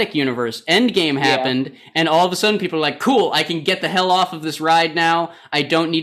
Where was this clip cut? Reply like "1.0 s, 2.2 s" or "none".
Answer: none